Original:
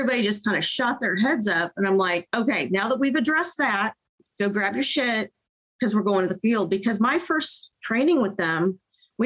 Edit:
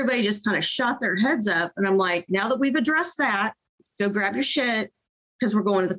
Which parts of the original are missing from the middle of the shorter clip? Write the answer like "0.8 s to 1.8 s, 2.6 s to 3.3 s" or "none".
2.3 s to 2.7 s

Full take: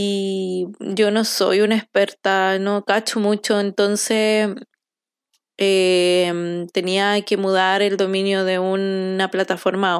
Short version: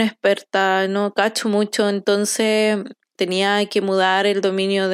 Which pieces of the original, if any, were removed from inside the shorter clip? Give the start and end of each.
4.9 s to 6.7 s

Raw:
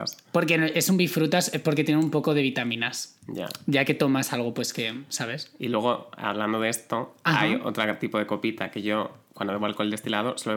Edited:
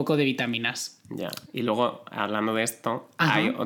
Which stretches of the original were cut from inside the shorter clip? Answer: 3.6 s to 5.5 s

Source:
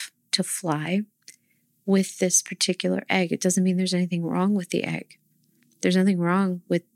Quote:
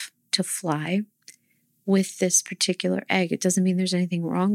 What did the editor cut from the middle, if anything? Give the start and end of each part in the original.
none

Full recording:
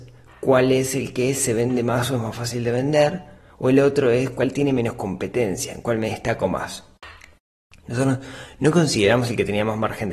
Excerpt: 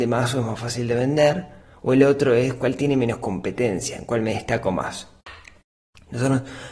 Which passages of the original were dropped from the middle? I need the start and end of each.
none

